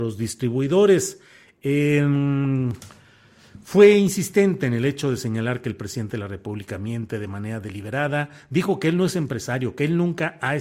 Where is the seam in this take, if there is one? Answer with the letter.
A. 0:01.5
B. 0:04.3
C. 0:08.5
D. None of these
D